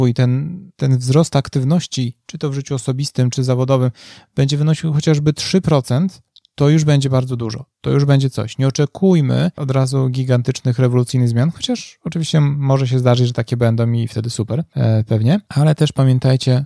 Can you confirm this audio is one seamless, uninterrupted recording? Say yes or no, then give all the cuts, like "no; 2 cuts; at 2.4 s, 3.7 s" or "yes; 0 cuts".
yes; 0 cuts